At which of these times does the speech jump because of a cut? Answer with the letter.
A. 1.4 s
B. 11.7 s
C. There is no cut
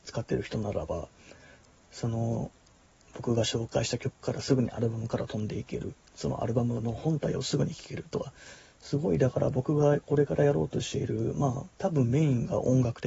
B